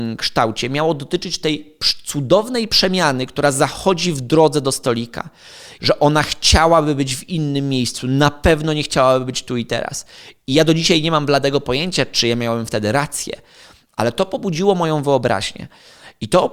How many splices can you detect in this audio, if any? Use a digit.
1